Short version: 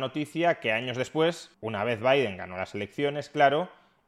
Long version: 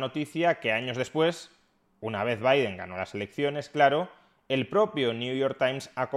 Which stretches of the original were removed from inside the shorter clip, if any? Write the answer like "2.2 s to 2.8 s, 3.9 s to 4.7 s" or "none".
1.5 s to 1.9 s

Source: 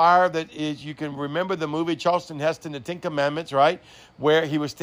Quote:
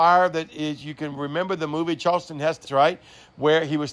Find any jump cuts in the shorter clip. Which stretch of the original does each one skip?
2.6 s to 3.5 s

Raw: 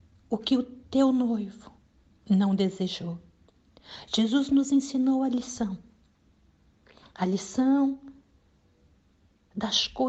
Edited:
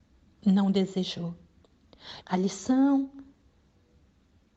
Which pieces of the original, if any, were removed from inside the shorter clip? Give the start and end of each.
4.0 s to 7.1 s

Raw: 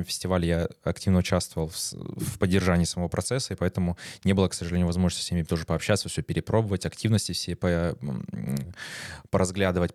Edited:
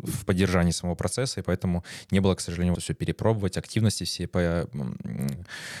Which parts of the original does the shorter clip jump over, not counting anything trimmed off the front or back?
4.9 s to 6.0 s

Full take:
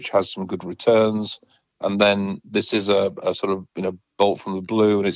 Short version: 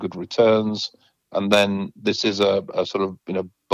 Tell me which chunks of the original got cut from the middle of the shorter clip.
none

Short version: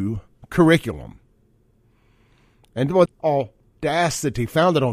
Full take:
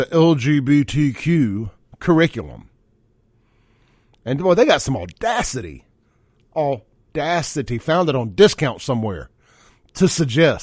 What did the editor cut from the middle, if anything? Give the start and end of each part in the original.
4.6 s to 6.4 s

